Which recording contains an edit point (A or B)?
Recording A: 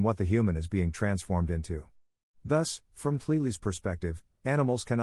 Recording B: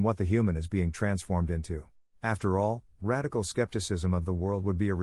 B